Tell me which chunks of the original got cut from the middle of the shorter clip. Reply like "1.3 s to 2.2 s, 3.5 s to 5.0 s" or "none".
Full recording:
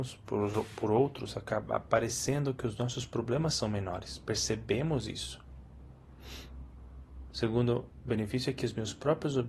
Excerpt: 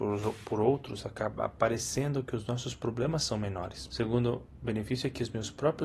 4.2 s to 7.3 s